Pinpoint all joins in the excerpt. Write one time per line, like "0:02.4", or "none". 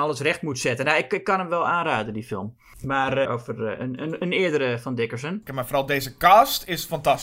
0:03.2
0:05.5

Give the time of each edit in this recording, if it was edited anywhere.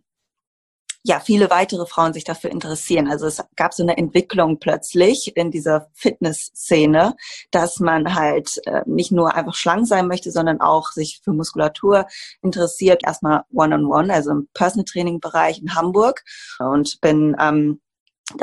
0:13.0
0:16.6

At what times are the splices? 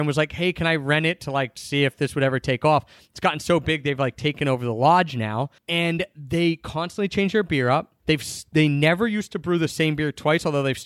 0:05.6
0:08.0

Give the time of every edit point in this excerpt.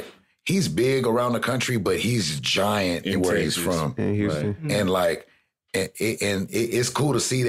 none

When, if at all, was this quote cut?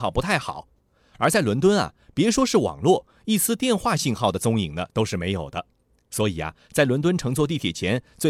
none

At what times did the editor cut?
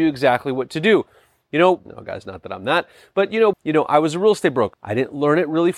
0:01.9
0:03.5
0:04.7

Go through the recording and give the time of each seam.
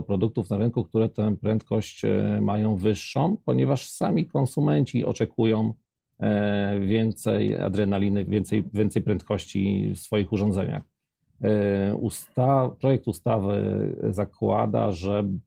0:08.3

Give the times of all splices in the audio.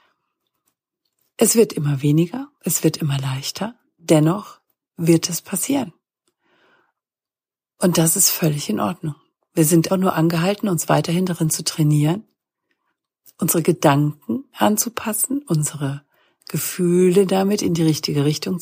0:09.9

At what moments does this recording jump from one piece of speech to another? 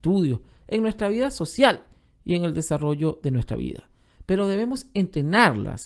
none

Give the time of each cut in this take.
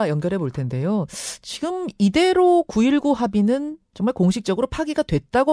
0:03.9

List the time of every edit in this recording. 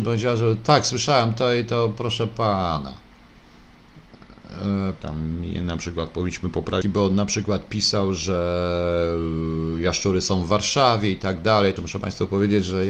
0:05.0
0:06.8
0:11.8

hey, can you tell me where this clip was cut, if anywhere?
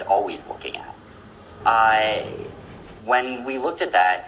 0:01.6
0:03.0

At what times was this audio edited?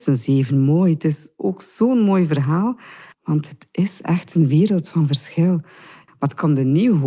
0:03.1
0:06.1

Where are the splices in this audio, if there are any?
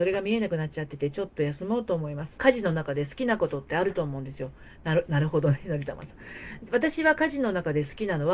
0:02.4

